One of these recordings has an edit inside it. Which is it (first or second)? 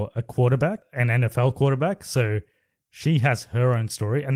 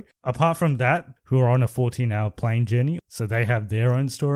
second